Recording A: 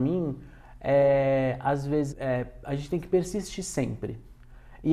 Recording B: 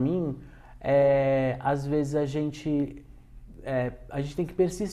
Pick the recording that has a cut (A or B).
A